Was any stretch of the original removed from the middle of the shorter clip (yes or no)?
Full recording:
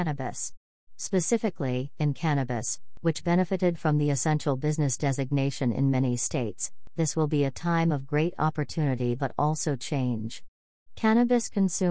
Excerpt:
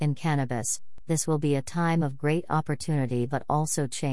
yes